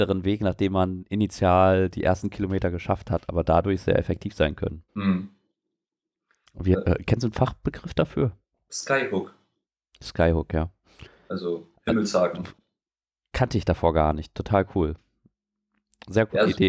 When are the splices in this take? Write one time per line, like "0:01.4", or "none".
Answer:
0:04.9